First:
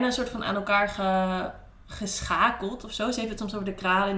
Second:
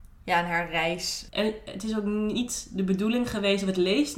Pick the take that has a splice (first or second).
second